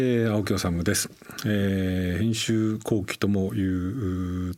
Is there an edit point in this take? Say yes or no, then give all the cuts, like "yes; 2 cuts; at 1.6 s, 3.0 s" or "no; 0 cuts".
no; 0 cuts